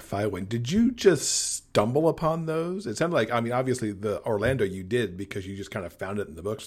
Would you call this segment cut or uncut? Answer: uncut